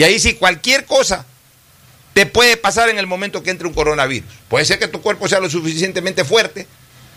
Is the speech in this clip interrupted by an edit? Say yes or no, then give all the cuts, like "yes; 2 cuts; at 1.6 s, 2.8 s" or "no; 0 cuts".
no; 0 cuts